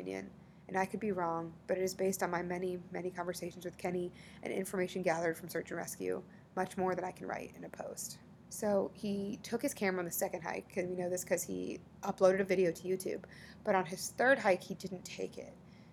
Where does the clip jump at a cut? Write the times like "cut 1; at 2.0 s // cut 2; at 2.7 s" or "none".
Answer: cut 1; at 8.5 s